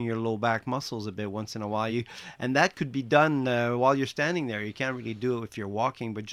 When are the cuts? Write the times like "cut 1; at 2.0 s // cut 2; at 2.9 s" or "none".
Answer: none

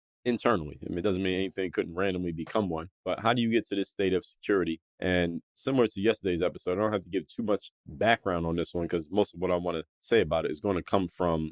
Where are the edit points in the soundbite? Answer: none

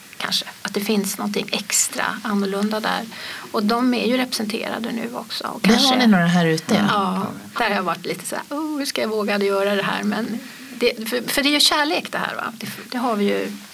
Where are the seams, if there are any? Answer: cut 1; at 7.6 s // cut 2; at 12.8 s

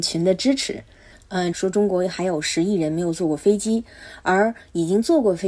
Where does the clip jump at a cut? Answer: cut 1; at 1.5 s

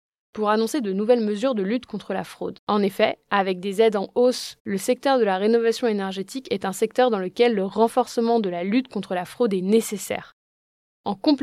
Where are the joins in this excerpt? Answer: cut 1; at 2.6 s // cut 2; at 4.6 s

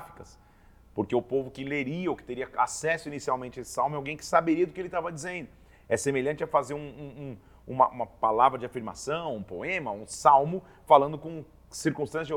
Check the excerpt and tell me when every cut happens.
none

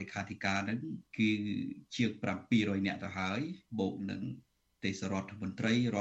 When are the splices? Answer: cut 1; at 1.1 s // cut 2; at 3.7 s

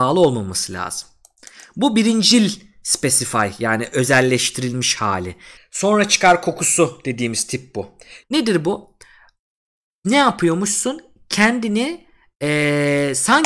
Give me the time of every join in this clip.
cut 1; at 5.6 s // cut 2; at 8.2 s

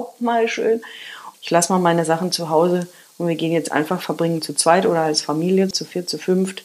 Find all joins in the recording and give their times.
cut 1; at 1.3 s // cut 2; at 5.7 s

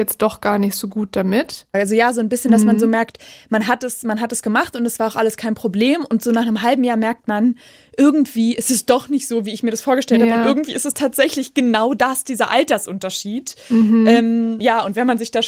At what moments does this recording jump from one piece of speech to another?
none

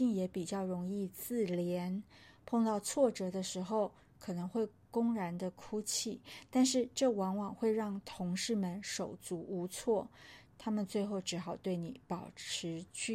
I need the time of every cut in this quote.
cut 1; at 10.5 s

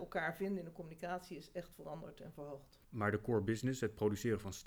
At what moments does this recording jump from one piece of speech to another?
cut 1; at 2.8 s

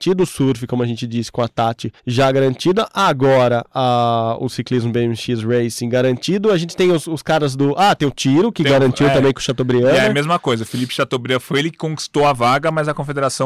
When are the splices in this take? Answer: cut 1; at 2.0 s

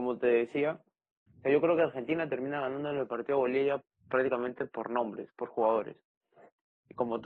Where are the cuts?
cut 1; at 1.3 s

